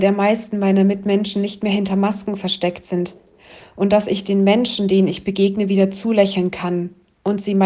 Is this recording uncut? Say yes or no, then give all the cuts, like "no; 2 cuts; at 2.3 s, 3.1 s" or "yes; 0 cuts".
yes; 0 cuts